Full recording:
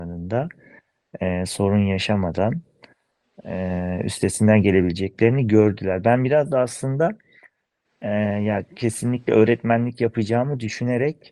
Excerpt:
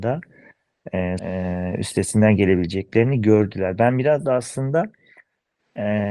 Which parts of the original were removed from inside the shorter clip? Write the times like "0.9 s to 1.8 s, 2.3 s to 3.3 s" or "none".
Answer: 1.5 s to 3.4 s